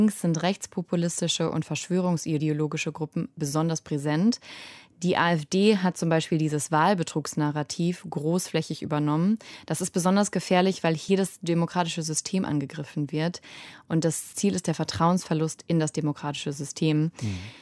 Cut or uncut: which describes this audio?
uncut